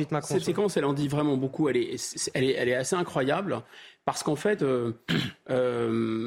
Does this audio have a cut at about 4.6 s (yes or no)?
no